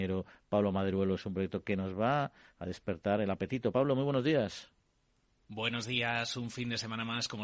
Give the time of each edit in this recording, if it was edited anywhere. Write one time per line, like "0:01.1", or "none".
none